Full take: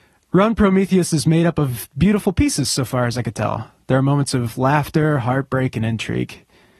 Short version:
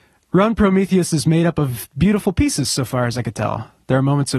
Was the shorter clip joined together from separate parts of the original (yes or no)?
no